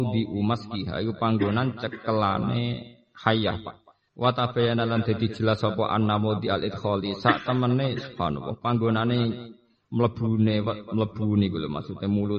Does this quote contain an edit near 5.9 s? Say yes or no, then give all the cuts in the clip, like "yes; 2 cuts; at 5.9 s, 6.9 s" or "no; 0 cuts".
no; 1 cut; at 4.1 s